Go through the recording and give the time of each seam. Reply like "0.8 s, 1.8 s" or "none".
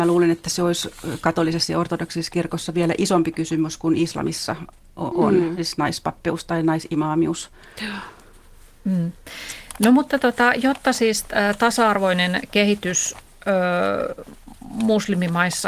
none